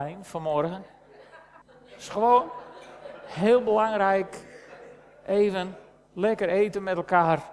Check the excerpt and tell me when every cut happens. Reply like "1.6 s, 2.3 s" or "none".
1.6 s